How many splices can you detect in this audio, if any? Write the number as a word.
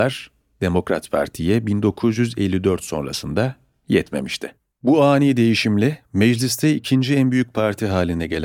one